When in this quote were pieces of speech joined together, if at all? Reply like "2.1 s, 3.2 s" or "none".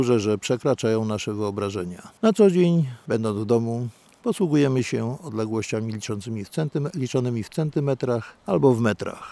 none

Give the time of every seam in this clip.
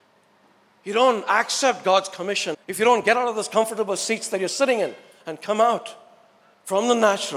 2.5 s

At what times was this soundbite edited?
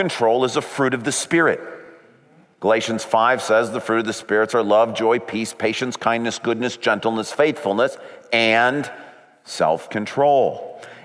none

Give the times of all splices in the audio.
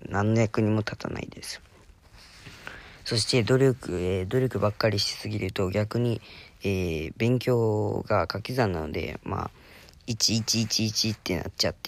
none

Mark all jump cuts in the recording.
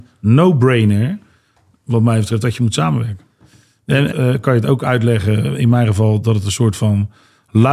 4.1 s

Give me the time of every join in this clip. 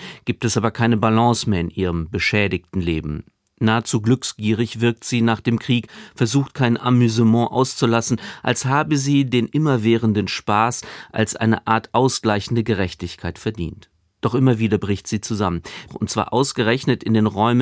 15.9 s

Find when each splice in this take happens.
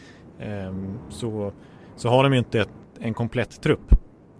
none

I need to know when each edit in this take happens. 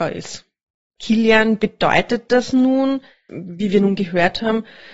1.0 s, 3.3 s

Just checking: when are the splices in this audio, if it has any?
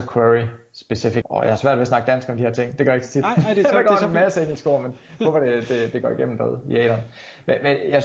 1.2 s

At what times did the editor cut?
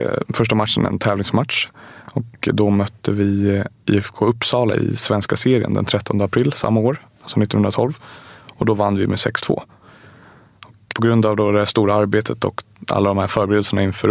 10.9 s

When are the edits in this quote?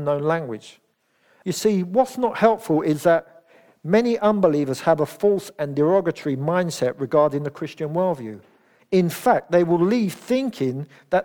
1.4 s, 8.8 s

